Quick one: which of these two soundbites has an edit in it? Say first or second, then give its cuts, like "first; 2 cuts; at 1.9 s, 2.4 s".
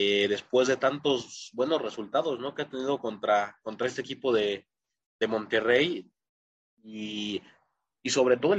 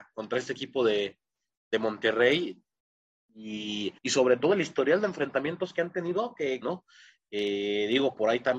second; 2 cuts; at 4.0 s, 6.6 s